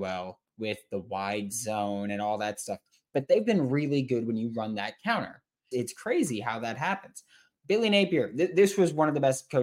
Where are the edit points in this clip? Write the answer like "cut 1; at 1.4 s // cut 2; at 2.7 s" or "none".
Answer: cut 1; at 5.7 s